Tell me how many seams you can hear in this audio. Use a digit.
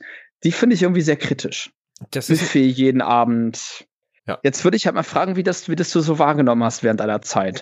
1